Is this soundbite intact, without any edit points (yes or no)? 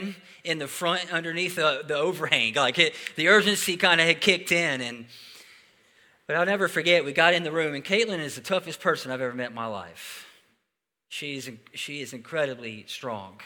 yes